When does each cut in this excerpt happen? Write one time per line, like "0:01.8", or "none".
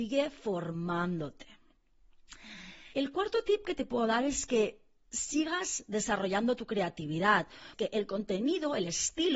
0:02.9
0:07.7